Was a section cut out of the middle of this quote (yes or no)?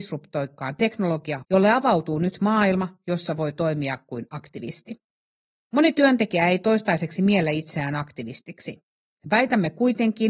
yes